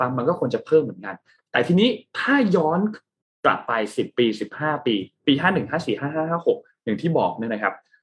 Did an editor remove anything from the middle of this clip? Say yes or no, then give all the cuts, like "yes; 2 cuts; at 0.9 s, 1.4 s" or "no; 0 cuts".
no; 0 cuts